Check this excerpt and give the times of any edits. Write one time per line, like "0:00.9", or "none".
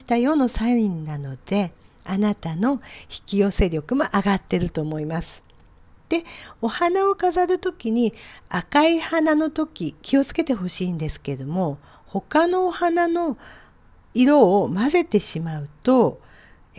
none

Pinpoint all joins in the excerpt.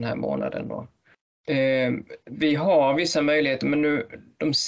0:01.3

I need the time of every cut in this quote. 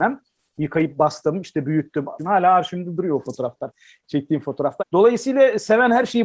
0:02.2
0:04.8

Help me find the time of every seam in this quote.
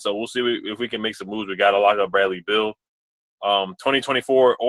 none

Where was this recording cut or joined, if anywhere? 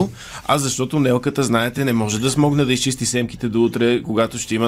none

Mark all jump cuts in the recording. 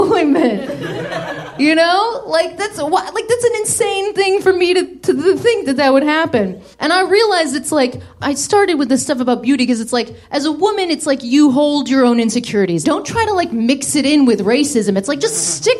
0:06.7
0:12.8

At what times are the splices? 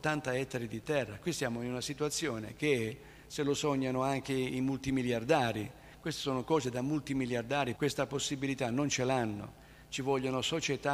0:07.7

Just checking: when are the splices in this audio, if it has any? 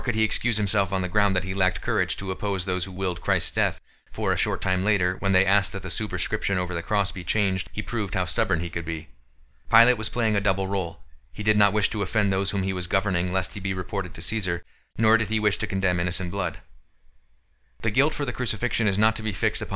none

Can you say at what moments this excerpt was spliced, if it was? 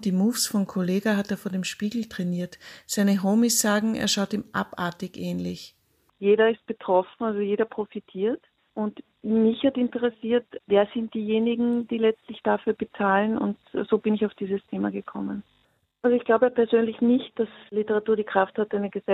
0:06.1
0:15.9

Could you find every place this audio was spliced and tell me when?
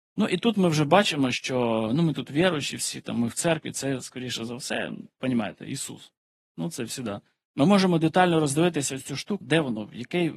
0:07.5
0:09.4

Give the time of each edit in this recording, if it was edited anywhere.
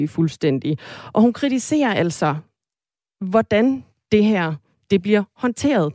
none

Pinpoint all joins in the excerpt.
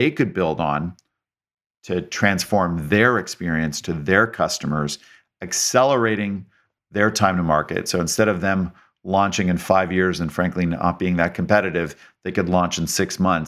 none

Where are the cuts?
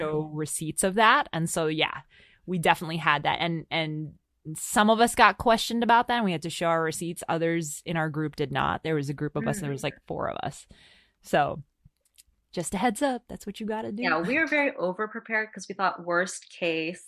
none

